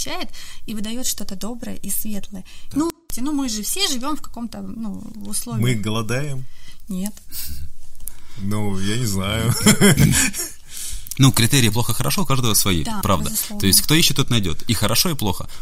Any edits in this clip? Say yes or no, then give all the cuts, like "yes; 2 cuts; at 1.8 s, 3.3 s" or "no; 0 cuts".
yes; 2 cuts; at 2.7 s, 13.0 s